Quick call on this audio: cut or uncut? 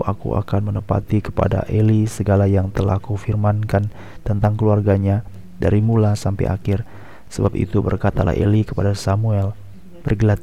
cut